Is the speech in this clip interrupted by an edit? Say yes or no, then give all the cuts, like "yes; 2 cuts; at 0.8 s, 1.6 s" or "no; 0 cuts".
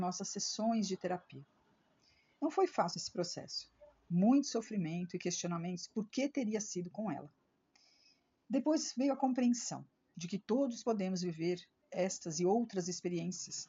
no; 0 cuts